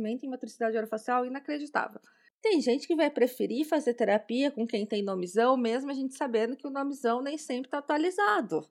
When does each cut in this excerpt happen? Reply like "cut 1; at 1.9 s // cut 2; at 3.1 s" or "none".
cut 1; at 2.3 s